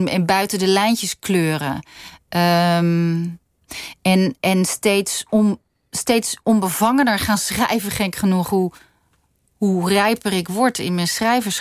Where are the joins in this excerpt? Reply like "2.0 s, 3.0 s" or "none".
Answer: none